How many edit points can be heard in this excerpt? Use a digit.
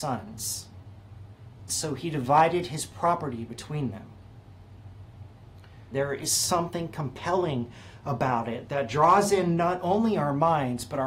2